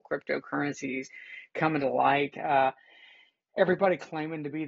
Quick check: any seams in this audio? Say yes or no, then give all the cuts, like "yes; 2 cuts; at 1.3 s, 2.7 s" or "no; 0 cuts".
no; 0 cuts